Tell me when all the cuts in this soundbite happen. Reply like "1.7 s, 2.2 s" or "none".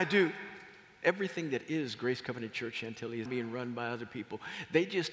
1.0 s, 3.3 s